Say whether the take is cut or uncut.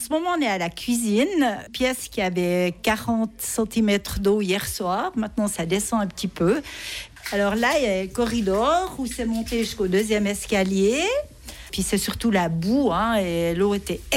uncut